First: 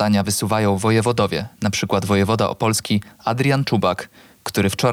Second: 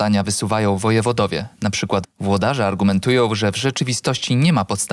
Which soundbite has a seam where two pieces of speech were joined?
second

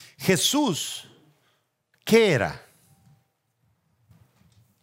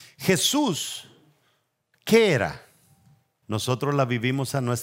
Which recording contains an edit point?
second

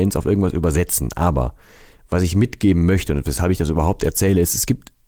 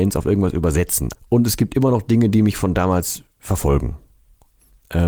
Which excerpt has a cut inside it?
second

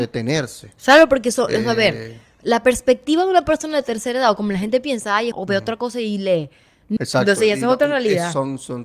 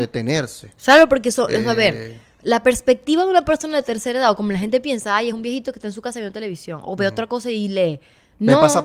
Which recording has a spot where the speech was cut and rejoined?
first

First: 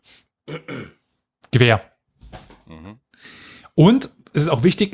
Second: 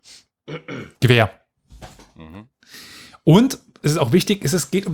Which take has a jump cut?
second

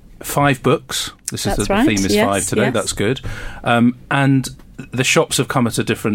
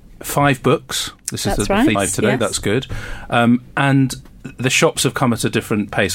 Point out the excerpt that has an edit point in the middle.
second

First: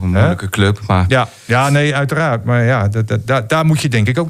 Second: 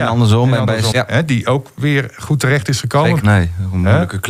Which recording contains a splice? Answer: second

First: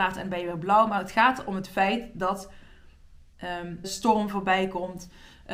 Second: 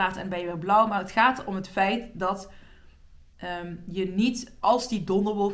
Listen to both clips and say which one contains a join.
first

